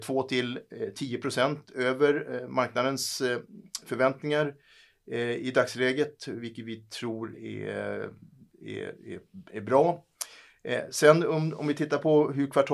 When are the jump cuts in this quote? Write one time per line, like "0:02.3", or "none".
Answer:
0:07.3